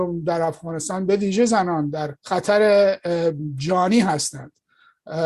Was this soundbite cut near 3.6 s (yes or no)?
no